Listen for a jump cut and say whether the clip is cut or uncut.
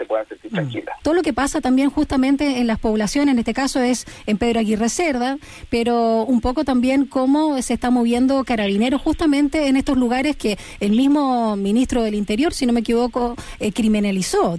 cut